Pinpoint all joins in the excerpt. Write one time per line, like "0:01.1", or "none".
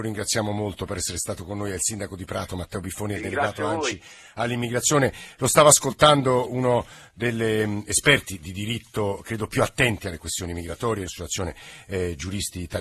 0:11.1